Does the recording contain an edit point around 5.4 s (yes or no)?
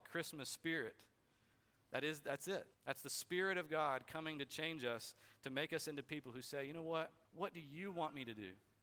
no